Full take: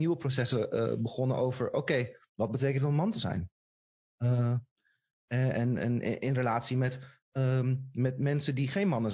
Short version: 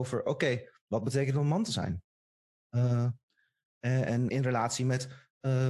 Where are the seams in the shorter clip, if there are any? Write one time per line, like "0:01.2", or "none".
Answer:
0:04.3